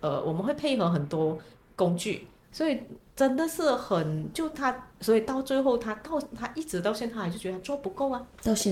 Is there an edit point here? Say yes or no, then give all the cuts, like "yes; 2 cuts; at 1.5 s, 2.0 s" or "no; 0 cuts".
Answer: yes; 1 cut; at 2.4 s